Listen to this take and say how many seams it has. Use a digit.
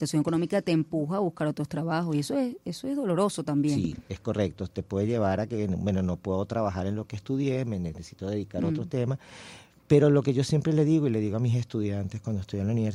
0